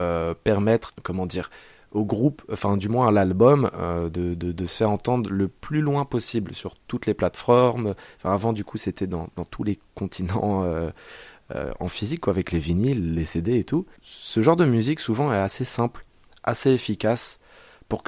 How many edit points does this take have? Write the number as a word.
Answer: zero